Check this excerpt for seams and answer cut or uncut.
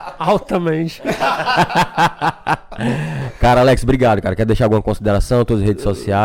uncut